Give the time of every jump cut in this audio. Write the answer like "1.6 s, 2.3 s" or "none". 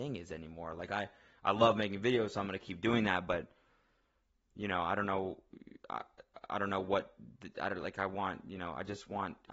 none